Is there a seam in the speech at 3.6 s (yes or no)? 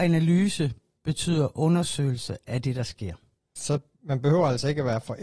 yes